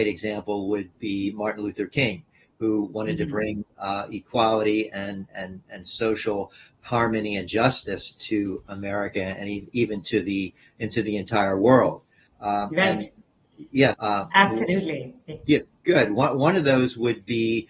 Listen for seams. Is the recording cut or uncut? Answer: cut